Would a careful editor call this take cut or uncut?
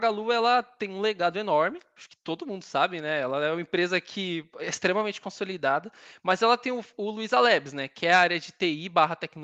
uncut